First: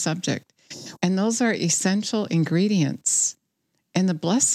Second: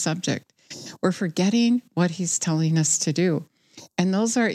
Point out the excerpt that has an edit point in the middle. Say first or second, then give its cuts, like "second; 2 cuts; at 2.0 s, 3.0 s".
first; 1 cut; at 1.0 s